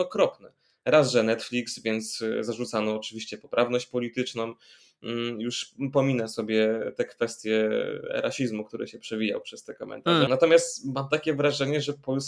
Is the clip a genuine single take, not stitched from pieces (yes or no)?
no